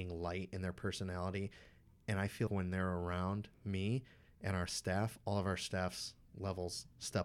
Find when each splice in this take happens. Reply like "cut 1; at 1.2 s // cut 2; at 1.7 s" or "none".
cut 1; at 2.5 s